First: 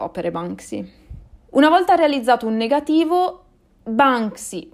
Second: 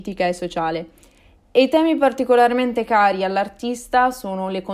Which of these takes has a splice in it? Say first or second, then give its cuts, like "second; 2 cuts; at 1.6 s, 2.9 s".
first; 1 cut; at 1.5 s